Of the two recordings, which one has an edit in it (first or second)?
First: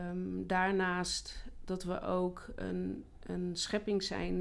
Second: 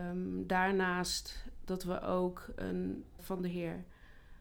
second